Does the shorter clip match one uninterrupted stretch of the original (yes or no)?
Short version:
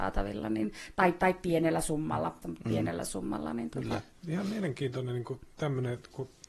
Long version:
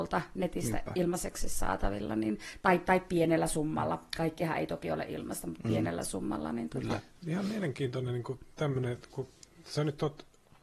no